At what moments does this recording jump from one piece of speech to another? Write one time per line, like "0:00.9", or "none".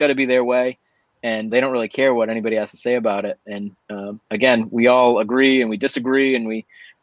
0:01.5